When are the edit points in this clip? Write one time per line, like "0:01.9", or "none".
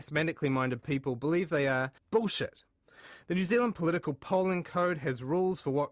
0:02.0